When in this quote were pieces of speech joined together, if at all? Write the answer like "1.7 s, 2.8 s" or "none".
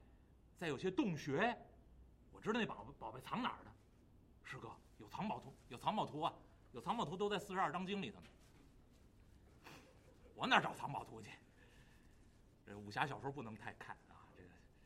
none